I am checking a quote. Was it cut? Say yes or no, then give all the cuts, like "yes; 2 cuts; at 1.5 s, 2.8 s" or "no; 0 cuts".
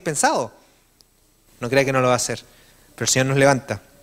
yes; 1 cut; at 1.5 s